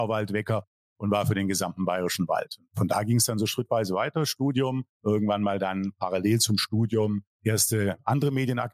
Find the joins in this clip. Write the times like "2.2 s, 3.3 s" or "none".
none

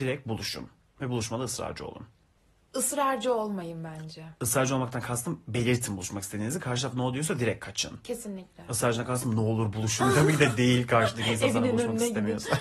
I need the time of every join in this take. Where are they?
none

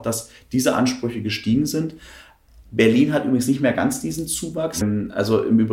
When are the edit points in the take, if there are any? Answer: 4.8 s

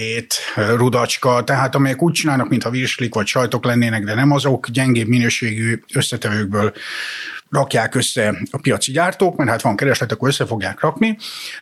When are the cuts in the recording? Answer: none

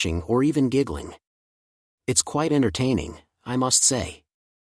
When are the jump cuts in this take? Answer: none

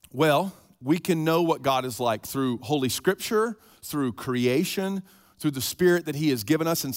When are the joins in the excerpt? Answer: none

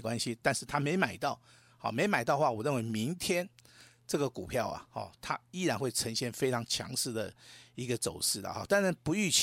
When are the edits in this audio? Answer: none

